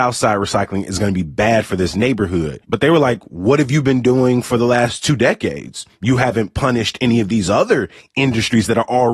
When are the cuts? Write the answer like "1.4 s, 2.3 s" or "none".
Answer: 2.6 s